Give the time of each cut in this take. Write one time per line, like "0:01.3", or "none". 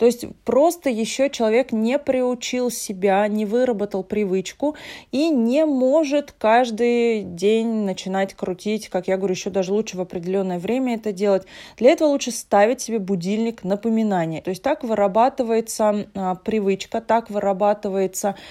0:14.4